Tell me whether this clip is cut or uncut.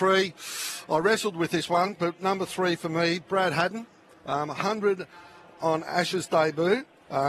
uncut